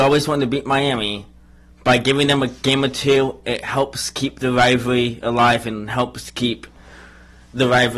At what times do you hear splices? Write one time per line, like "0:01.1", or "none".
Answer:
none